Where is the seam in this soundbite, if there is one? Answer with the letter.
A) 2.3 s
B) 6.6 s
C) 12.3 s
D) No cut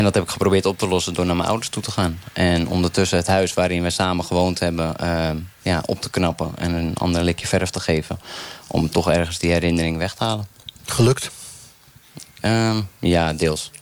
D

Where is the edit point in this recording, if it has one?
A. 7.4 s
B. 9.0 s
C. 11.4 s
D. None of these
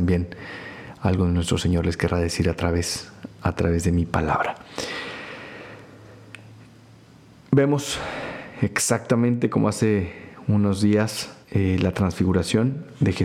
C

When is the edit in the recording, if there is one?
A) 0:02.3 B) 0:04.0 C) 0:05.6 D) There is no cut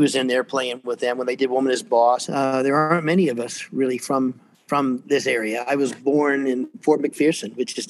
A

